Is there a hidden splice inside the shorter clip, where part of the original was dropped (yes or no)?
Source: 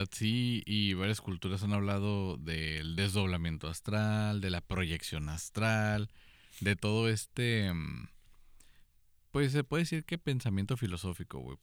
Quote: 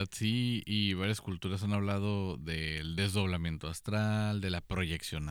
no